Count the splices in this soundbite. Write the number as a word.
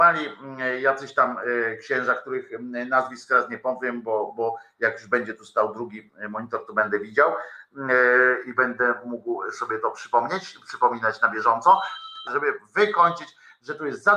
one